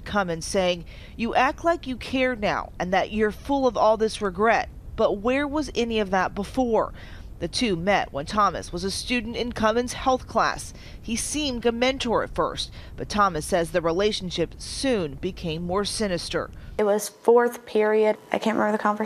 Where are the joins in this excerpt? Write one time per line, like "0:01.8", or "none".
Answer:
0:11.6